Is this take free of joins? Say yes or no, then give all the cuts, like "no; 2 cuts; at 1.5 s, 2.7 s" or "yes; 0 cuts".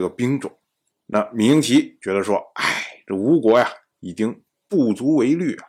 no; 1 cut; at 0.9 s